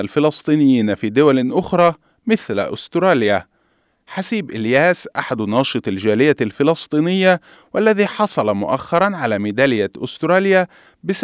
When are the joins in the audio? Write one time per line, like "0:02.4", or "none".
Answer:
none